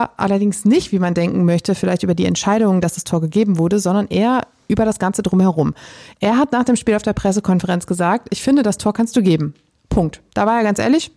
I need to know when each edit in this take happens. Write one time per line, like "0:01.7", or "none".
none

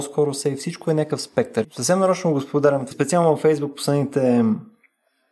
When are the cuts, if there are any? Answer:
0:01.6
0:02.9

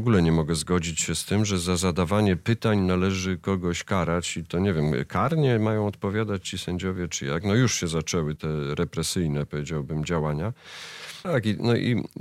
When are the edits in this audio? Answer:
0:08.4
0:11.2

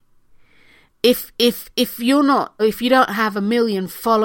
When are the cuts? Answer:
0:02.6

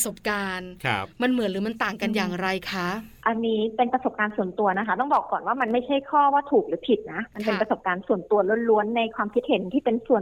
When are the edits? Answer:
none

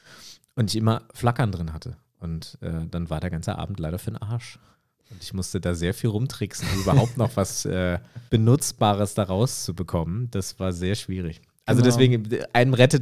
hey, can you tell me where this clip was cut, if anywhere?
0:08.3

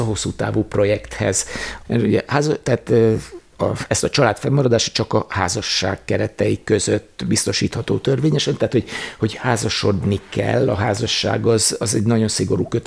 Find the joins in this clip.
0:01.8

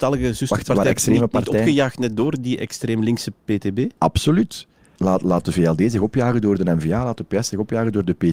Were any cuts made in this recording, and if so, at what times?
0:05.0

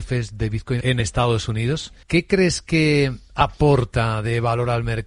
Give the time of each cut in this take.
0:02.0

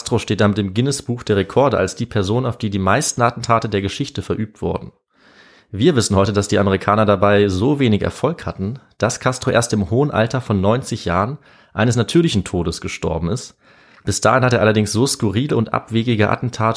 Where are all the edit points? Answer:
none

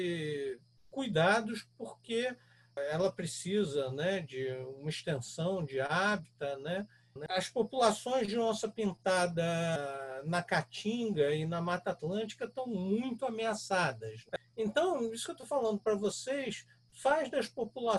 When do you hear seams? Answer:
0:07.2

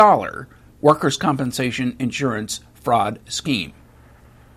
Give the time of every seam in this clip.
none

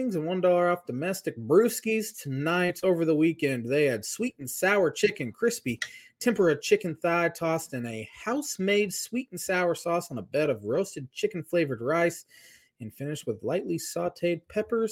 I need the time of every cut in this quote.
none

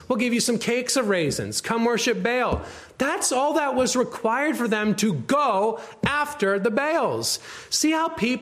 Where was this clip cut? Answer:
none

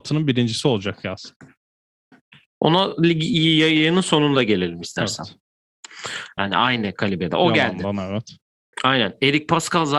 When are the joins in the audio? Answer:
0:06.4
0:08.7

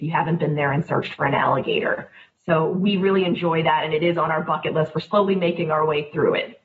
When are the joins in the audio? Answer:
none

